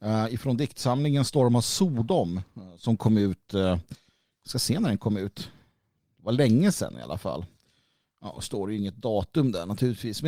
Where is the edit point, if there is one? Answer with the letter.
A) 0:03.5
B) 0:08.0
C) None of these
C